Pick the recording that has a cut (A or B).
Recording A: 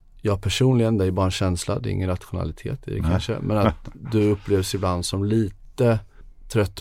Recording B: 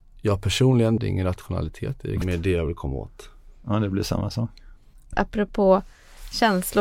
B